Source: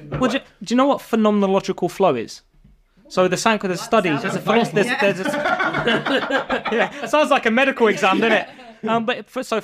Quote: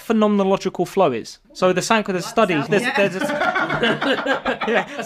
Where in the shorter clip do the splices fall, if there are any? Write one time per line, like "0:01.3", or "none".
0:01.4
0:02.7